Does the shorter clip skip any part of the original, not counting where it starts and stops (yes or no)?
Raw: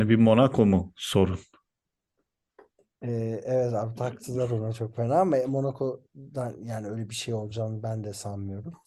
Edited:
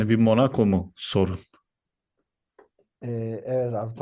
no